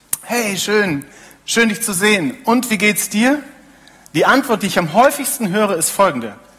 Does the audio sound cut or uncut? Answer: uncut